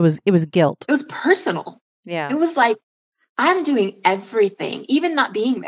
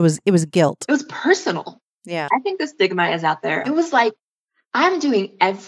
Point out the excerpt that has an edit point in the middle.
second; 2 cuts; at 2.3 s, 3.6 s

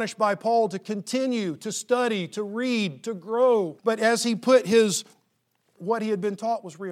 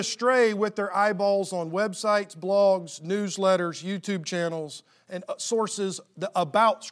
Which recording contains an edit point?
first; 2 cuts; at 3.8 s, 5.8 s

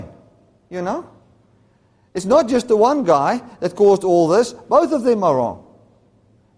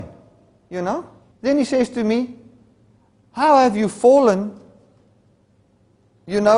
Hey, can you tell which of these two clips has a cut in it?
second; 1 cut; at 1.3 s

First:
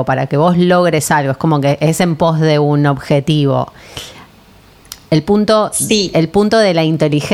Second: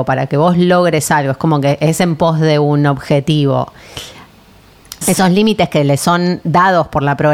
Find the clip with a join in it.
second; 1 cut; at 5.0 s

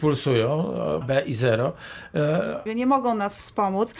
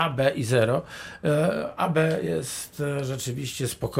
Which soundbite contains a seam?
first; 2 cuts; at 1.0 s, 2.7 s

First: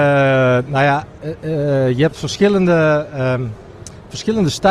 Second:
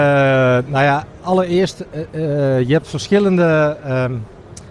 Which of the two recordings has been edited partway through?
first; 1 cut; at 1.2 s

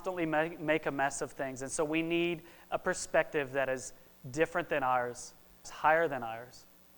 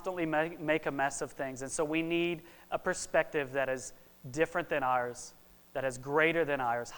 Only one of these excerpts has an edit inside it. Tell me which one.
first; 1 cut; at 5.6 s

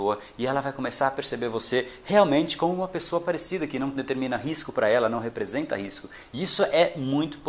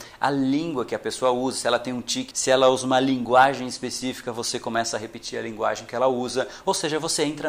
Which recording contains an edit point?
second; 1 cut; at 2.3 s

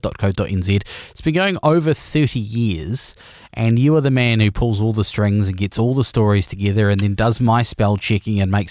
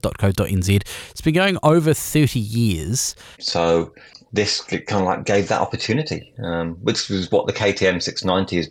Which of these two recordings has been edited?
second; 1 cut; at 3.3 s

